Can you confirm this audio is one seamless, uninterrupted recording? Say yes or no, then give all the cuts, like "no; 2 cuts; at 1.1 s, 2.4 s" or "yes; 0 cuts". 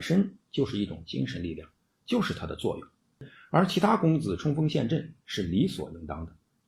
yes; 0 cuts